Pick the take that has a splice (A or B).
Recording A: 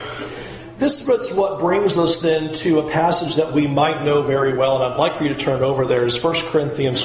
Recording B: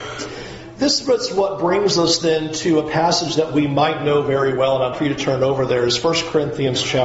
B